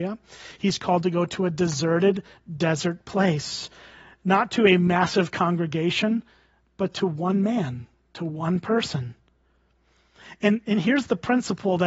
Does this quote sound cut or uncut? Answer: uncut